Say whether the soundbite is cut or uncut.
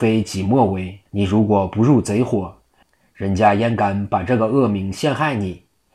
cut